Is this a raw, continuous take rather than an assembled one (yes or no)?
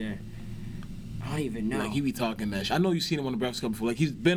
yes